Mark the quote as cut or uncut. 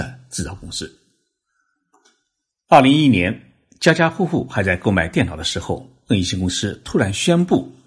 uncut